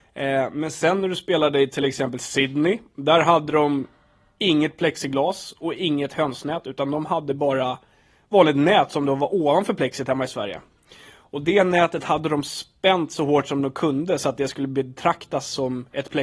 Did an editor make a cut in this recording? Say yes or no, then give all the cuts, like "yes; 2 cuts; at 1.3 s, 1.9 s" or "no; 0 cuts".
no; 0 cuts